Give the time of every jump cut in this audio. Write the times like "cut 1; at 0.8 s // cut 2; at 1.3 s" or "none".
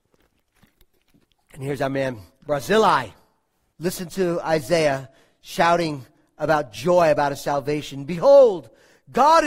cut 1; at 3.7 s